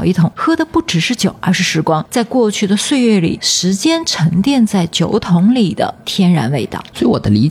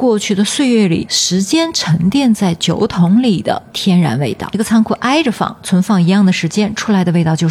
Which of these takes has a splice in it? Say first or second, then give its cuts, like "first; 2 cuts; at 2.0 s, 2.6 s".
second; 1 cut; at 4.5 s